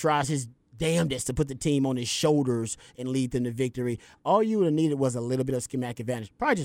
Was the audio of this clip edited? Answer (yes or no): no